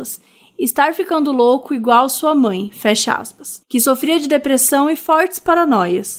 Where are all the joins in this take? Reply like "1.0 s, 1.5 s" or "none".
3.6 s